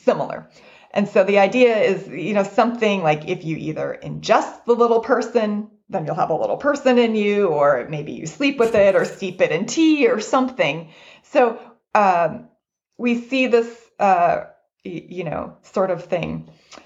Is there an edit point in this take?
no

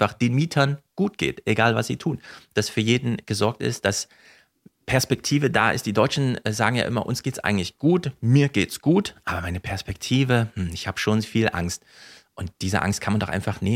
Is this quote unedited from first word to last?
yes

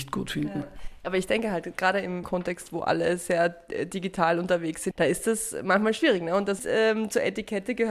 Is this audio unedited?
no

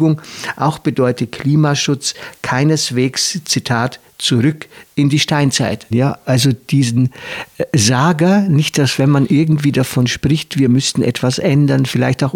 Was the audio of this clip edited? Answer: yes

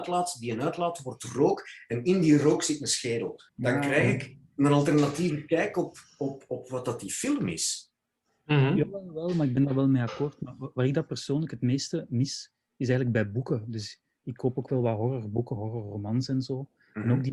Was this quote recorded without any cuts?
no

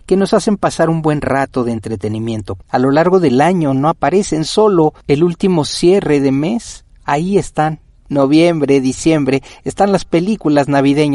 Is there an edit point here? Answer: yes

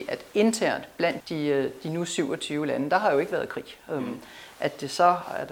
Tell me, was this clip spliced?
yes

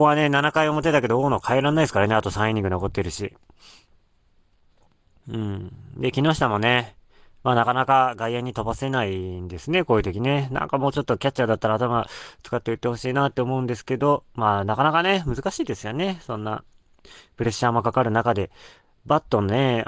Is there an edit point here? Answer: no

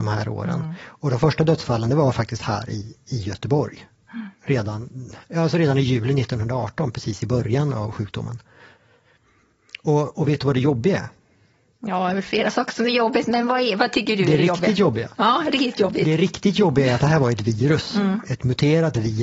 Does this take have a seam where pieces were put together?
no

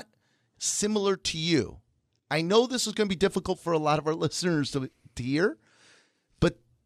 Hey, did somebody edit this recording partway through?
no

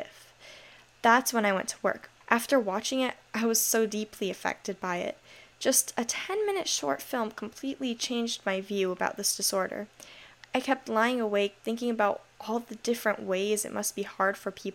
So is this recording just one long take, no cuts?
no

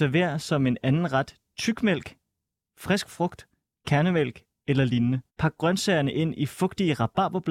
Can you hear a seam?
yes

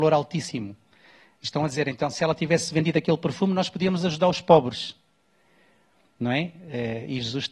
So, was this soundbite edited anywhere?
no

